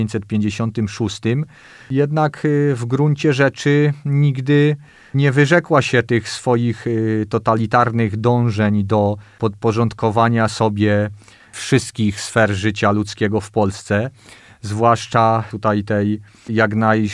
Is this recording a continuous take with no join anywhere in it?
yes; 0 cuts

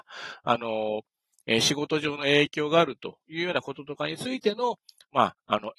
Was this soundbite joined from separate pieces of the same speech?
no; 0 cuts

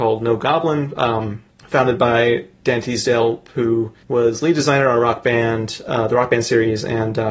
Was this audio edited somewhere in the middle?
yes; 2 cuts; at 1.5 s, 4.0 s

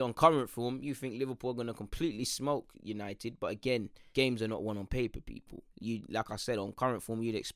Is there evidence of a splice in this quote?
yes; 2 cuts; at 4.1 s, 5.7 s

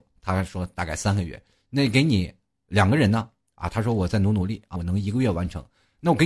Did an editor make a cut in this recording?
yes; 1 cut; at 4.8 s

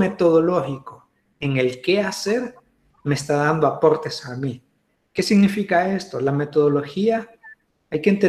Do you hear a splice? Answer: no; 0 cuts

